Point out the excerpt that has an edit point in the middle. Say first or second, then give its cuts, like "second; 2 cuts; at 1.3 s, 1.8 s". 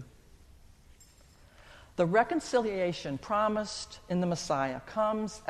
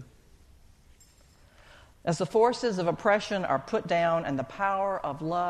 second; 1 cut; at 1.9 s